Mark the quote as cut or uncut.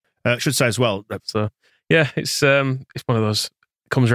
cut